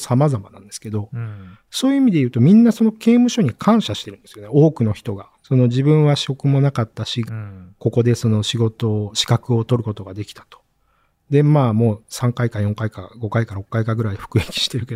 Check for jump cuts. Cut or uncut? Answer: cut